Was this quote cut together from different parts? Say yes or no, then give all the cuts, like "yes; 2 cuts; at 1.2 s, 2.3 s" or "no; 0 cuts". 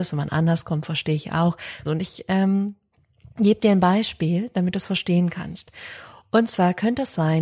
yes; 1 cut; at 1.9 s